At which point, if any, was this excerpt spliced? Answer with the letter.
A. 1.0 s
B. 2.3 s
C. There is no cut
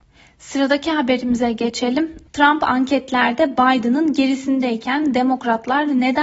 B